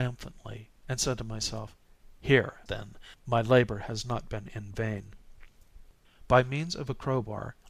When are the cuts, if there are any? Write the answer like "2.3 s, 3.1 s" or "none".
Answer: 2.7 s, 6.0 s